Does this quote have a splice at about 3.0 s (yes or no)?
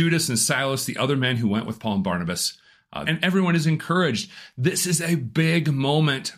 yes